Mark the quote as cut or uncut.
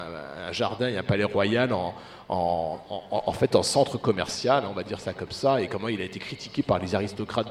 uncut